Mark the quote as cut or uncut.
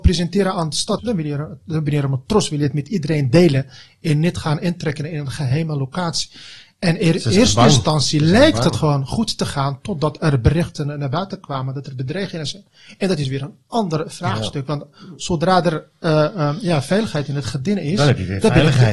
cut